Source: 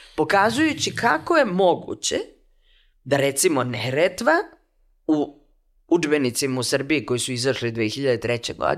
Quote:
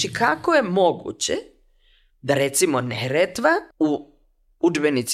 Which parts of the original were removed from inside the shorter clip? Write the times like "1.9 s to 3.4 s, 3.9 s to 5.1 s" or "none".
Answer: 4.5 s to 5.0 s

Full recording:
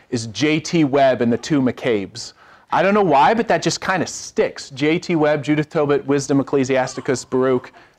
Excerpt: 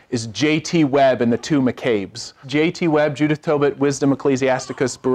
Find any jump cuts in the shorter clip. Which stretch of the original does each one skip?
2.4 s to 4.7 s

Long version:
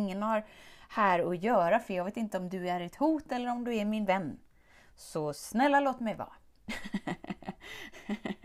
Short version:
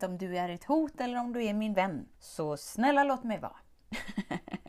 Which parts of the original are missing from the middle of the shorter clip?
4.4 s to 4.9 s

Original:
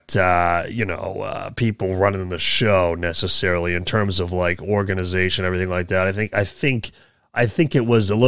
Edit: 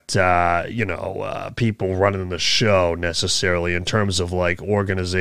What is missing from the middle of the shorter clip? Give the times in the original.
none

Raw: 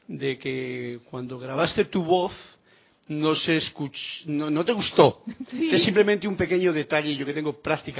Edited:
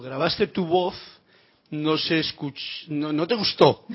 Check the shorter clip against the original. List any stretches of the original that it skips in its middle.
none

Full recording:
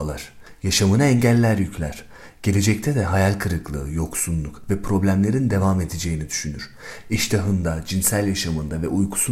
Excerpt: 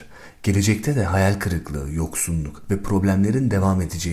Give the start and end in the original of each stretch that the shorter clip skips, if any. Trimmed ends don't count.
none

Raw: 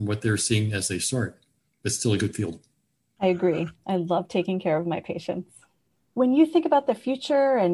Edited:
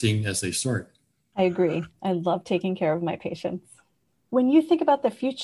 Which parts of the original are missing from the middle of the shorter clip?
1.7 s to 3.1 s

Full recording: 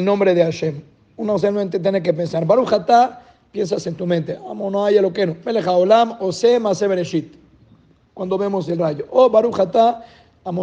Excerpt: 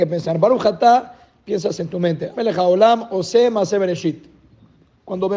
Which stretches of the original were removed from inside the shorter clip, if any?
4.4 s to 5.4 s

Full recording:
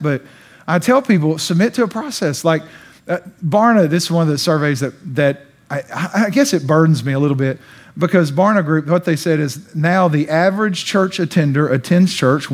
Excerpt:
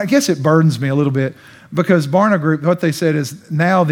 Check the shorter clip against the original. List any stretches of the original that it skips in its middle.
none

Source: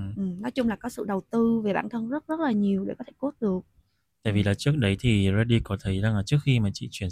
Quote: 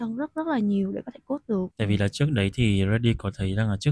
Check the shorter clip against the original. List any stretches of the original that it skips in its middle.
3.6 s to 4.2 s

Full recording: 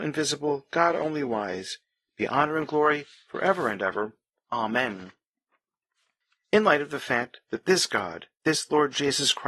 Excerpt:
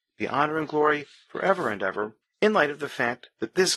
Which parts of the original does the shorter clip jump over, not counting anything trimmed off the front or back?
4.2 s to 6.3 s

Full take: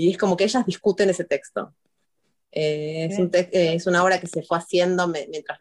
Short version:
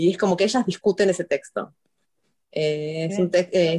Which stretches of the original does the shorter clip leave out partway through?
none

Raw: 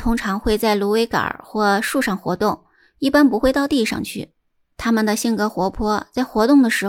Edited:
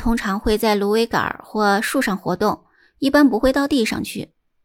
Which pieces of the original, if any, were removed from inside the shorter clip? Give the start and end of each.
none

